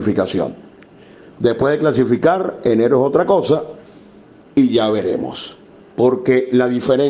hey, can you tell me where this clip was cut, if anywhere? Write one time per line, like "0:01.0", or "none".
0:05.8